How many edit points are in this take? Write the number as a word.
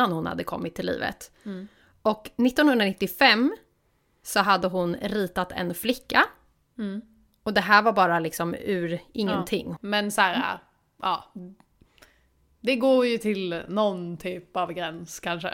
two